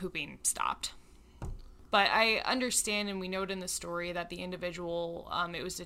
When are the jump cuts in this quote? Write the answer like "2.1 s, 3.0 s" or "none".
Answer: 1.9 s